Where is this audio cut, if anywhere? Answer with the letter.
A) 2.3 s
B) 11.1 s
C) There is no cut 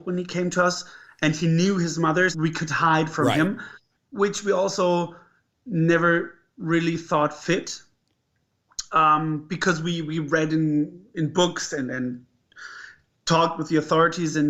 A